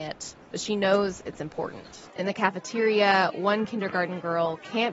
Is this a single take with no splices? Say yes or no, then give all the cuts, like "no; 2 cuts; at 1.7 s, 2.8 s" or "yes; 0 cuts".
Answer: no; 1 cut; at 2.1 s